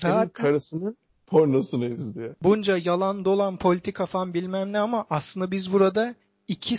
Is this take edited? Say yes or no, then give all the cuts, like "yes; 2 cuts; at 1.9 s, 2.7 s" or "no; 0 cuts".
yes; 1 cut; at 2.3 s